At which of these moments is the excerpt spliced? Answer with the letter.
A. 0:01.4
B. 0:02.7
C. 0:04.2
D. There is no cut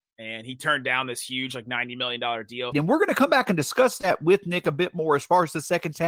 B